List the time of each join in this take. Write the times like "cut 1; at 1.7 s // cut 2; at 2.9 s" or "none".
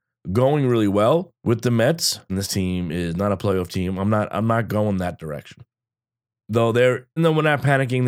cut 1; at 2.3 s // cut 2; at 7.2 s